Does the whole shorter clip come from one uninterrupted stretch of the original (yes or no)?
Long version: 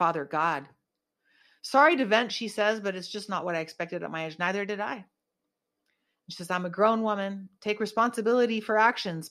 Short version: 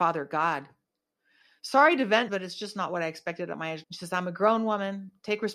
no